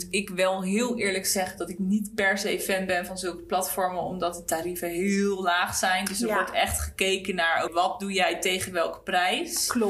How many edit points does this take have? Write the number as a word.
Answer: one